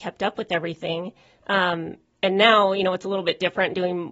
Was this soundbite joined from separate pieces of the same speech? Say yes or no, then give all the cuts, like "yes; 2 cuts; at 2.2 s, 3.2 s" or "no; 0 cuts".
no; 0 cuts